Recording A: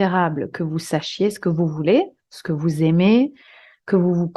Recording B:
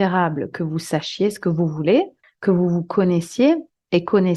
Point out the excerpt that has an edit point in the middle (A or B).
B